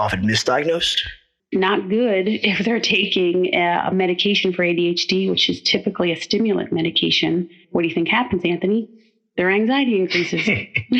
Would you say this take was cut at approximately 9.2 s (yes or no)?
no